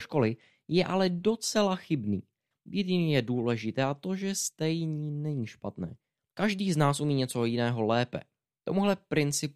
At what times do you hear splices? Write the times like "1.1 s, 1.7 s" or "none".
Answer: 2.5 s, 6.3 s